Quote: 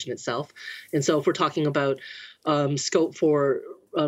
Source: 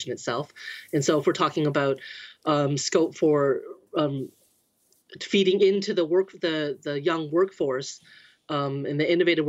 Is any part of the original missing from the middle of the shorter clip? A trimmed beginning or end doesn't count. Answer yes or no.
no